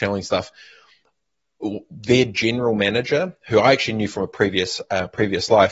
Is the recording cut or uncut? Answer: uncut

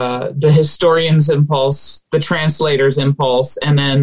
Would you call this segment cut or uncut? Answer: uncut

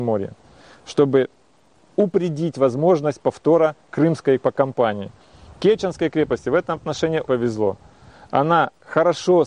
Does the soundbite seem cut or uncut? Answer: cut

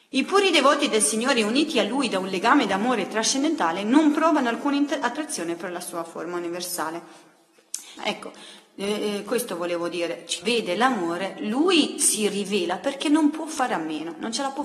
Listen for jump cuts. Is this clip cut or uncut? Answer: cut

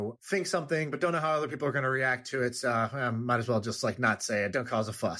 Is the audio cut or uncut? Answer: uncut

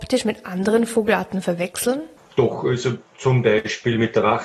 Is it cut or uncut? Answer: cut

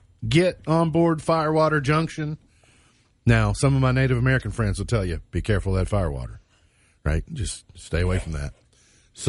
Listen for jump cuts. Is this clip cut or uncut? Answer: uncut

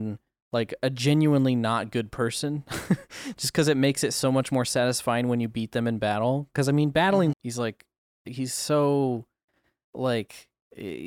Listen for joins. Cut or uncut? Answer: cut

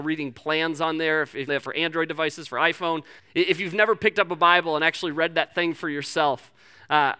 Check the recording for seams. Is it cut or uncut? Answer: cut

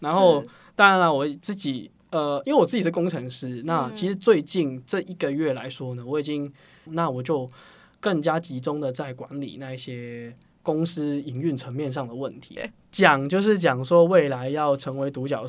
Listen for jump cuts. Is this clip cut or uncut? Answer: cut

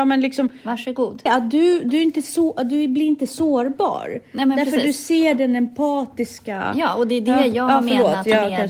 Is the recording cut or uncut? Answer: cut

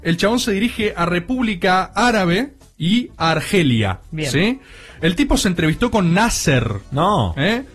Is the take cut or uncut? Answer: uncut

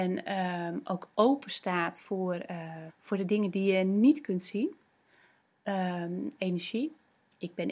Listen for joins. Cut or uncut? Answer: cut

